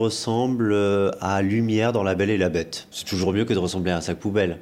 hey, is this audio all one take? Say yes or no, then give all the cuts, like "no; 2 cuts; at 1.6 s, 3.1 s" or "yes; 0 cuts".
no; 1 cut; at 2.9 s